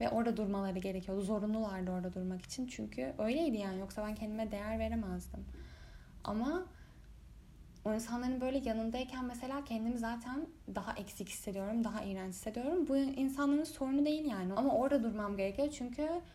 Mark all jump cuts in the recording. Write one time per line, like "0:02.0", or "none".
0:14.5